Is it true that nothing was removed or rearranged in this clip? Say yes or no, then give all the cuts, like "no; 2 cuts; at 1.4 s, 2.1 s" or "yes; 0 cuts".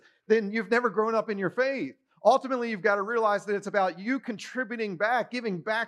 yes; 0 cuts